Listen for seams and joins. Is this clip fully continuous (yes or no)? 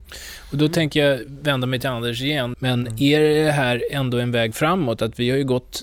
no